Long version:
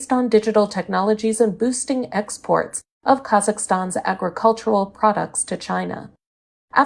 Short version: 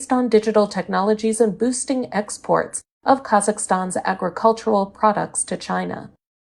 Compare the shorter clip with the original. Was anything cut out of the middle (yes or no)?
no